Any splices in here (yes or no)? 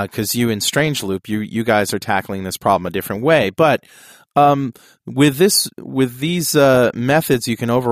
no